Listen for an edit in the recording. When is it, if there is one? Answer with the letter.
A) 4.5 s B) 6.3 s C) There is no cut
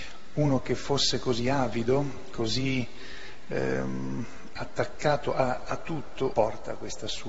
B